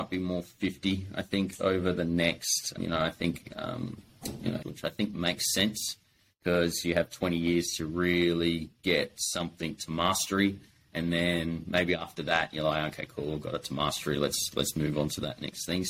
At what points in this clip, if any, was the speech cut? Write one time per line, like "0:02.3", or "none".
0:02.8
0:04.6